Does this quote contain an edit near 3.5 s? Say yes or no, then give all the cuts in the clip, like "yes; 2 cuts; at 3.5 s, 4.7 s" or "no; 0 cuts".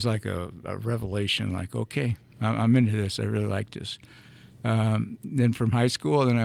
no; 0 cuts